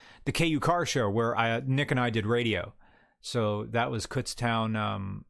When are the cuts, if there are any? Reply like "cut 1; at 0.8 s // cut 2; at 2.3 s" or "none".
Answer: none